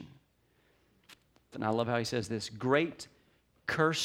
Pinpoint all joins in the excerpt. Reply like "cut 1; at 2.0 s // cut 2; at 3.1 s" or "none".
cut 1; at 1.5 s